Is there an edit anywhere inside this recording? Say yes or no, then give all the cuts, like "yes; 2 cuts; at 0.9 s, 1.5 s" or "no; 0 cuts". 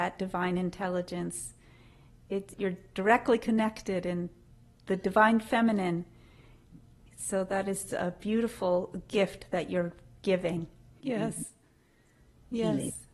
yes; 2 cuts; at 2.5 s, 11.0 s